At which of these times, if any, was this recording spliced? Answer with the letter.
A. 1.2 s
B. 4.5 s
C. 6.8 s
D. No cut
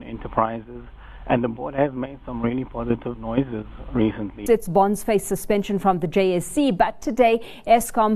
B